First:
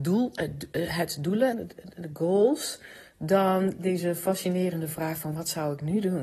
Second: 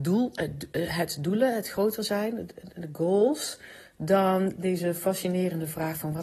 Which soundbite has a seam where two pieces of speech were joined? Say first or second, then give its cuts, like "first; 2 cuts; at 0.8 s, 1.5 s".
first; 1 cut; at 1.5 s